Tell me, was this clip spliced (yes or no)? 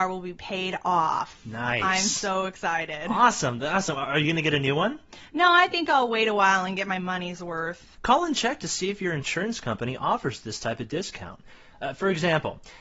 yes